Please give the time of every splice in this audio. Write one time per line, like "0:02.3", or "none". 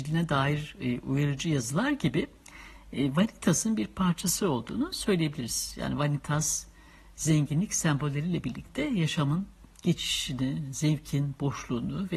none